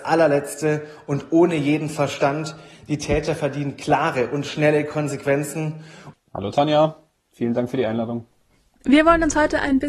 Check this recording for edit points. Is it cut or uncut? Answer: cut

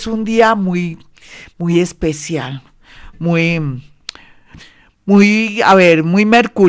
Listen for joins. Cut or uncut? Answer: uncut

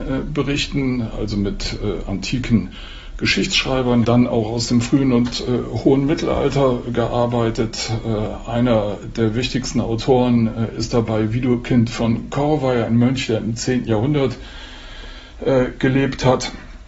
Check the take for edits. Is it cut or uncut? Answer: cut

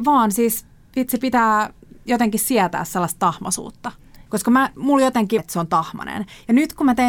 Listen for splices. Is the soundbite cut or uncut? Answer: cut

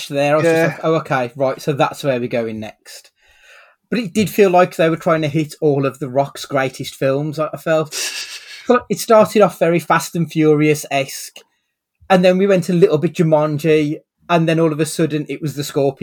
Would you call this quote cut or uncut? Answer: uncut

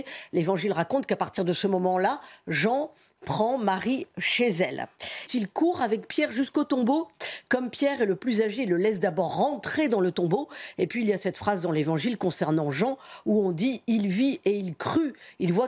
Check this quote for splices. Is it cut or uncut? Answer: cut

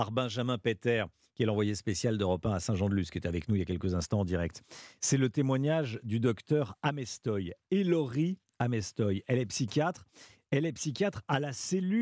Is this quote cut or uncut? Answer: uncut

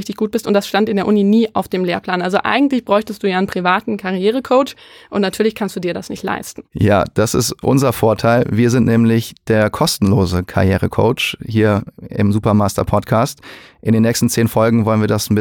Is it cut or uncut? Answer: uncut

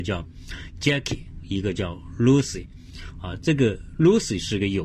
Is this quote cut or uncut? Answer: uncut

